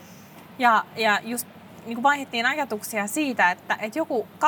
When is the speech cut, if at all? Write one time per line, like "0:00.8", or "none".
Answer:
none